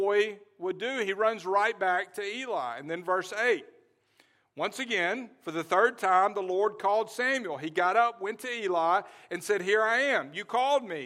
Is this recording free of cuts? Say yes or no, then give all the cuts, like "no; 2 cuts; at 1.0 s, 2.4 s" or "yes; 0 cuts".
yes; 0 cuts